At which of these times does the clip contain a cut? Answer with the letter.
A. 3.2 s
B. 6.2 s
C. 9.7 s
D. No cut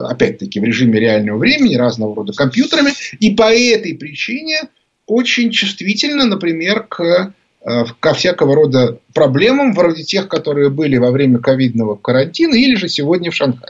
D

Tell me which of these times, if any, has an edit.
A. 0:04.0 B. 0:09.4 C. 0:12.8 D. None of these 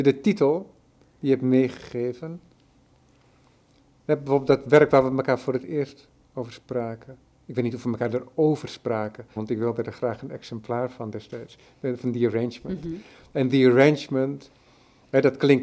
B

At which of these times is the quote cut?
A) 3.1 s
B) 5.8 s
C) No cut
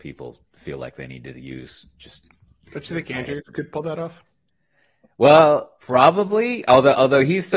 B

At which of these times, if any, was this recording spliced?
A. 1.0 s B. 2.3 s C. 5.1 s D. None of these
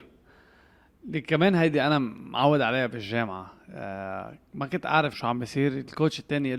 C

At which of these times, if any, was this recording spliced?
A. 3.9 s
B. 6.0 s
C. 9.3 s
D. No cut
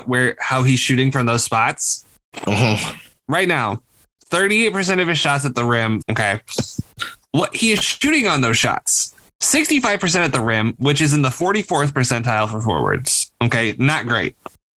B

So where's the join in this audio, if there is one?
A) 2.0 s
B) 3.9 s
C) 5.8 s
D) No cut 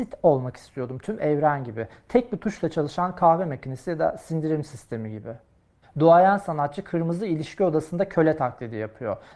C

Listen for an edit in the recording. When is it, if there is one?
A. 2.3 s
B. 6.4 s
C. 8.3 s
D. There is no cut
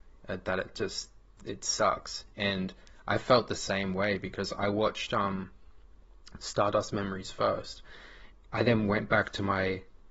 C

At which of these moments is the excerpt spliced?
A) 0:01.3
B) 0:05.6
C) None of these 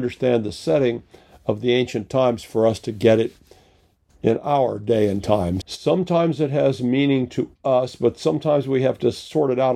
B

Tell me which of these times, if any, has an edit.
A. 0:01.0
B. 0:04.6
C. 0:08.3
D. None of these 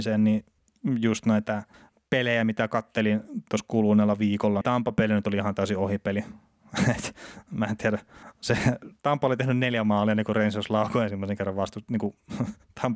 B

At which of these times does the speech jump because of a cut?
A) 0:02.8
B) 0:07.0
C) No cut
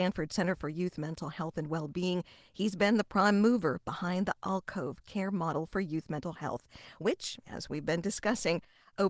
C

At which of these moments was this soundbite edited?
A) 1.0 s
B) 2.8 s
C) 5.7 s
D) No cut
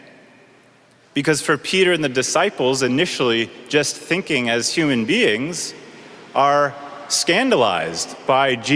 A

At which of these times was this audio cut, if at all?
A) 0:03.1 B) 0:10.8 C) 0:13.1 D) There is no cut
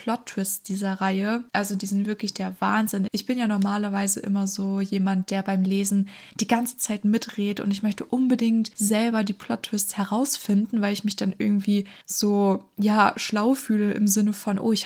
A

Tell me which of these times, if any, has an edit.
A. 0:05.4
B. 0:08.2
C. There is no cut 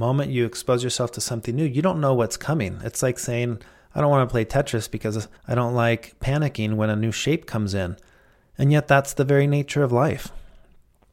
A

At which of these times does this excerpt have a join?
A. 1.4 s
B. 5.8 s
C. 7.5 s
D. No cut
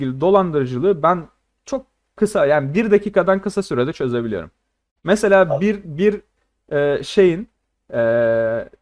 D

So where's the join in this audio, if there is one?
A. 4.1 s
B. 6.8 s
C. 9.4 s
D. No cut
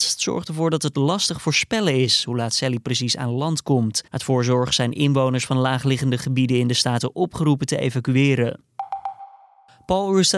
A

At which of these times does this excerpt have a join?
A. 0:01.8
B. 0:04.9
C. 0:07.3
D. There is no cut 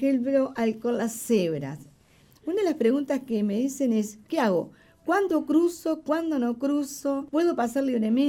C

